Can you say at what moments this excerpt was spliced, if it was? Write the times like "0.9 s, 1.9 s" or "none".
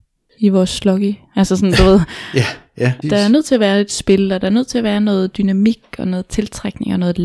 3.0 s